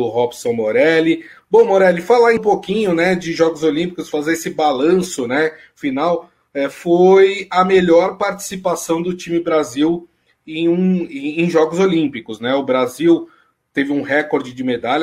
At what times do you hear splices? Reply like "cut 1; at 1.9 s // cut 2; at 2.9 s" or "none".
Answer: cut 1; at 2.4 s